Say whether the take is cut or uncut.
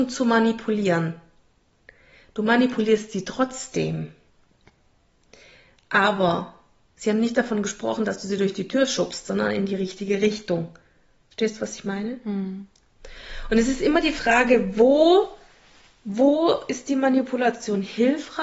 uncut